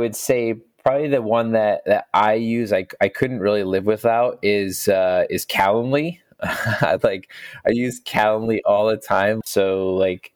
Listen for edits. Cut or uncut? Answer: cut